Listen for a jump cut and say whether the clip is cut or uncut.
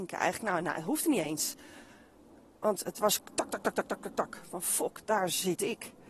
uncut